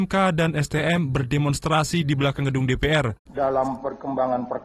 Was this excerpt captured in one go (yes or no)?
no